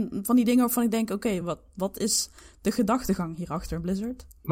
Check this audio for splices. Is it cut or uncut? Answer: uncut